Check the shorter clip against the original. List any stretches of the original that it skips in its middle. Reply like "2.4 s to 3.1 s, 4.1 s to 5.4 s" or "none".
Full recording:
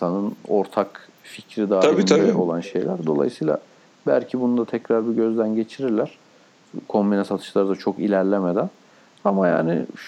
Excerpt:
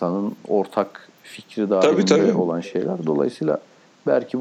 none